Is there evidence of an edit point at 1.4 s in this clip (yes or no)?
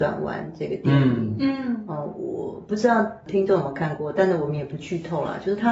no